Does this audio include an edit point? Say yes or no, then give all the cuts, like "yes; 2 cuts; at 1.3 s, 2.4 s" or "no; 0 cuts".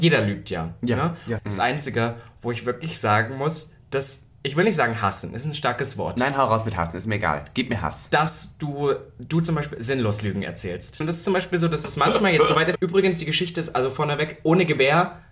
yes; 3 cuts; at 1.4 s, 11.0 s, 12.8 s